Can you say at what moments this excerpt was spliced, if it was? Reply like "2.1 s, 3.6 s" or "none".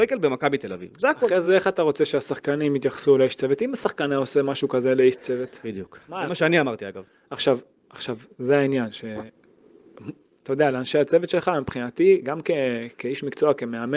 none